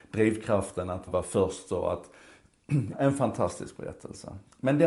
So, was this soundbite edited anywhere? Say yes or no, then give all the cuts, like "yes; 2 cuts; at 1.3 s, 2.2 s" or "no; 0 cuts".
yes; 2 cuts; at 1.1 s, 2.9 s